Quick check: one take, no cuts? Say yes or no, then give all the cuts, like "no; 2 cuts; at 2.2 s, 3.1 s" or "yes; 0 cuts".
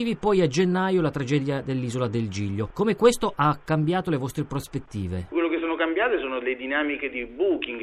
yes; 0 cuts